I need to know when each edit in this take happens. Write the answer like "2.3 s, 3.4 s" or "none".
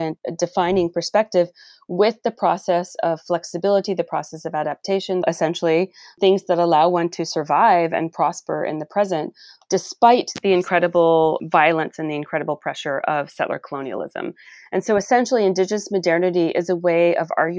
5.2 s